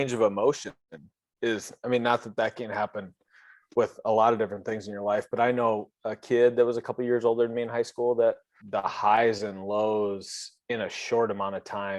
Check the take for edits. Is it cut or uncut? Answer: cut